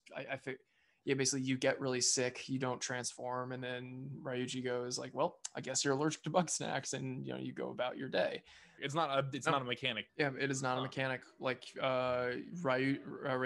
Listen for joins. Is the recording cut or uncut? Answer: cut